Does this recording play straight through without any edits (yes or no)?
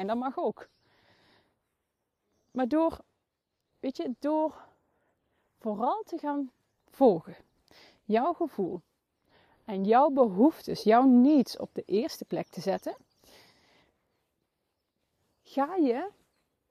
yes